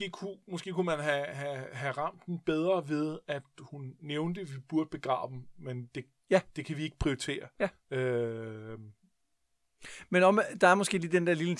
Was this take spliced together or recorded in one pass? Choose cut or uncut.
uncut